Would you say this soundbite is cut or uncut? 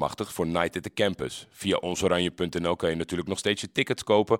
uncut